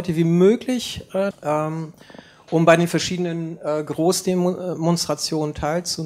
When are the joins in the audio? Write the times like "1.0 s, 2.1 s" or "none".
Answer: 1.3 s